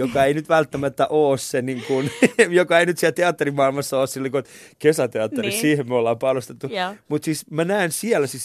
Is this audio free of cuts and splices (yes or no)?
yes